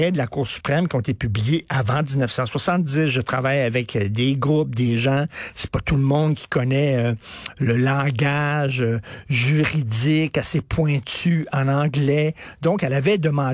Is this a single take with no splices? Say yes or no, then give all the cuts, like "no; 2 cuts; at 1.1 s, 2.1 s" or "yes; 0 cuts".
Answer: no; 1 cut; at 7.5 s